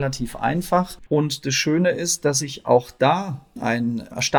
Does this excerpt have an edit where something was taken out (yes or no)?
yes